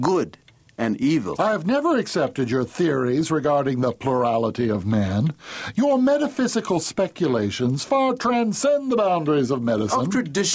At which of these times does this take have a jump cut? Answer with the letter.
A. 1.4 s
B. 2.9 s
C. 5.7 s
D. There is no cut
A